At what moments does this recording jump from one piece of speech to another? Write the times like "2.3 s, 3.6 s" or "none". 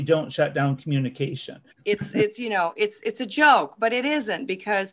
1.7 s